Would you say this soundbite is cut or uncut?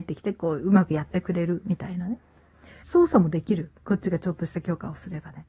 cut